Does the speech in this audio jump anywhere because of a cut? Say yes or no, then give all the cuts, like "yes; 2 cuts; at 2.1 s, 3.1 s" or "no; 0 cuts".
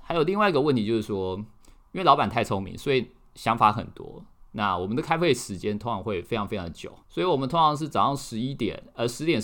yes; 1 cut; at 7.0 s